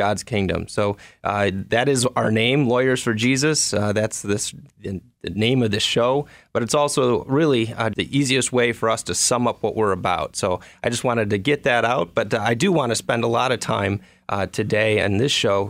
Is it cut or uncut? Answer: cut